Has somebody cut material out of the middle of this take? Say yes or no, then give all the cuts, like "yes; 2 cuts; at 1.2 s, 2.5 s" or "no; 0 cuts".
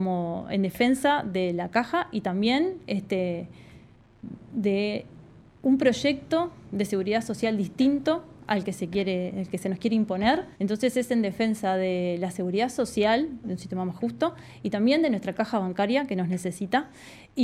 yes; 2 cuts; at 10.5 s, 13.4 s